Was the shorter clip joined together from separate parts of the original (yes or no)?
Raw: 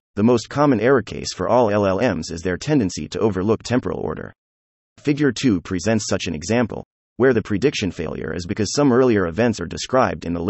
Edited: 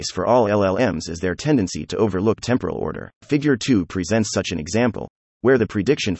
yes